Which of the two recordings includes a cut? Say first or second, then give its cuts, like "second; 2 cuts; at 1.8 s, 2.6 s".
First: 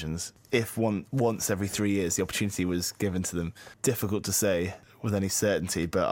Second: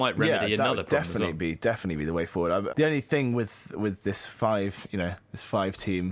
second; 1 cut; at 2.7 s